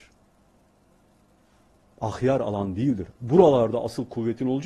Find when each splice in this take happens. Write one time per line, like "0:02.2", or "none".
0:03.1